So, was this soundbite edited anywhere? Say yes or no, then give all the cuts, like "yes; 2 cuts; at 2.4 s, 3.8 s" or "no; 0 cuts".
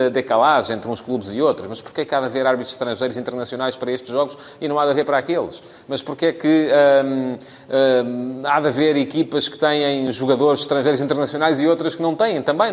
no; 0 cuts